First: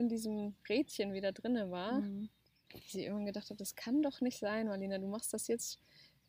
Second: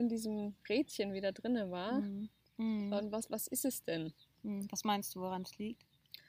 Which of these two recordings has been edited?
second; 1 cut; at 2.6 s

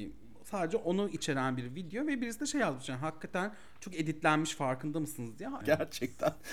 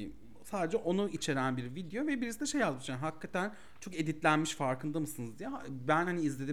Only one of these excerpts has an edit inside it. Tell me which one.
first; 1 cut; at 5.6 s

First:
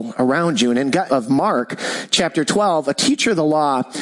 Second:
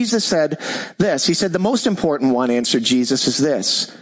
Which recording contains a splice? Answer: first; 1 cut; at 1.1 s

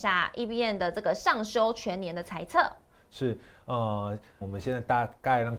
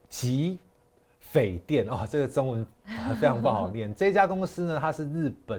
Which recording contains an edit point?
first; 1 cut; at 4.4 s

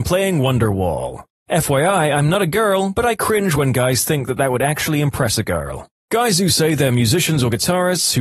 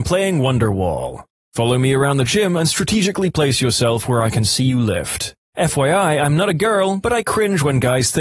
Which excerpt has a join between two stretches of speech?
second; 2 cuts; at 1.4 s, 5.4 s

